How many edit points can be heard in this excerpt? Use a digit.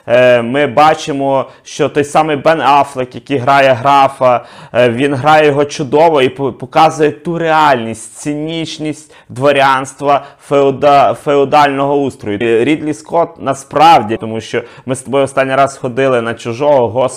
2